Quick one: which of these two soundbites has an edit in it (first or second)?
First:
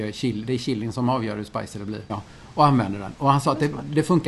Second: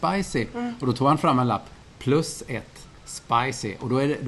first